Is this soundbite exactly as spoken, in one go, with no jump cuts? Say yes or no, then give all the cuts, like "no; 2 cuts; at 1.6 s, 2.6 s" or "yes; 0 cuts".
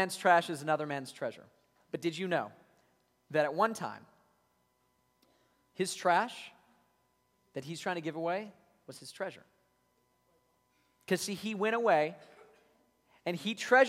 yes; 0 cuts